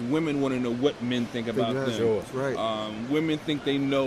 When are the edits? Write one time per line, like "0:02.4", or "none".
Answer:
none